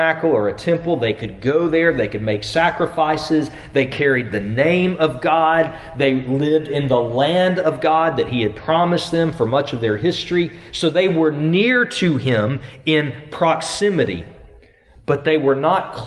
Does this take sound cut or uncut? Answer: uncut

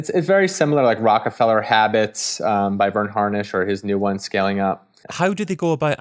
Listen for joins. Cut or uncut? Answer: cut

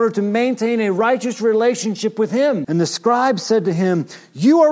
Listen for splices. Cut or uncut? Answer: cut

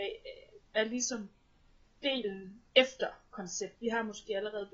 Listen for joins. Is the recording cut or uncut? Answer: cut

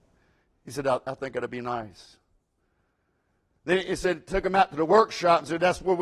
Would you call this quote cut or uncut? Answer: uncut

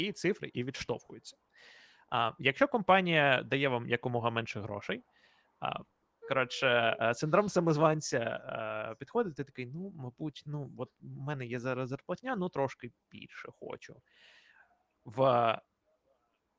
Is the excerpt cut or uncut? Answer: cut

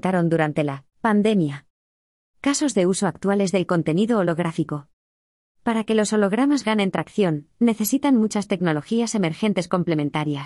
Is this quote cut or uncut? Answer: uncut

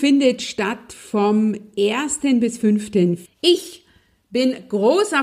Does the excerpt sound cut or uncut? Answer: cut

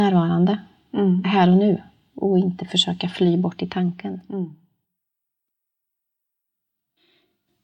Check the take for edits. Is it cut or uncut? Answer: uncut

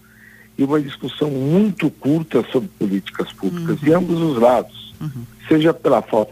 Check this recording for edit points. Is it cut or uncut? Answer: uncut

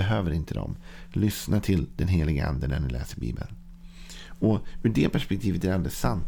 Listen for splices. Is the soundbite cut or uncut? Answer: uncut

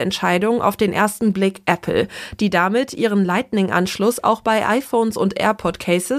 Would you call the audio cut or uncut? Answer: uncut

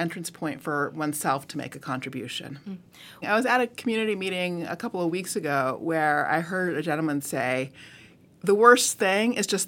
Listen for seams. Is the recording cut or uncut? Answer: cut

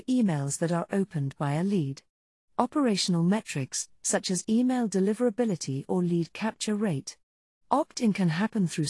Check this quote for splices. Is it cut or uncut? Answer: cut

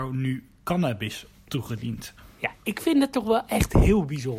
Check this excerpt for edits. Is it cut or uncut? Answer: uncut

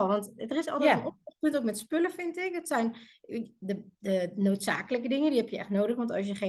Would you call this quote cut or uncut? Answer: uncut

